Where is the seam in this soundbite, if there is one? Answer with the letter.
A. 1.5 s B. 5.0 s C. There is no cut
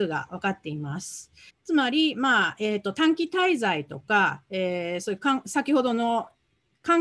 A